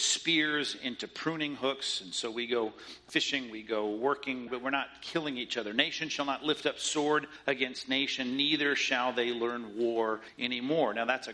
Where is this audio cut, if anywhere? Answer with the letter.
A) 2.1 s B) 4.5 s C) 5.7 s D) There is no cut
B